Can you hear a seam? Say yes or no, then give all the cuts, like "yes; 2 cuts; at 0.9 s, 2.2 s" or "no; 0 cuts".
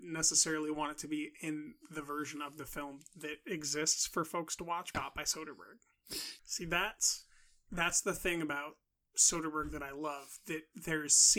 yes; 2 cuts; at 4.9 s, 6.4 s